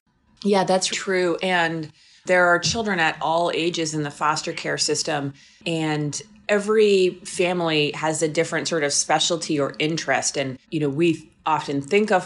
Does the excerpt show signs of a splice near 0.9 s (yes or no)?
yes